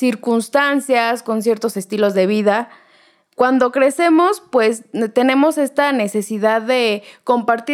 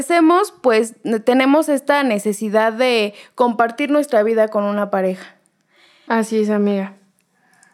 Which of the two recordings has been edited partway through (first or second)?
second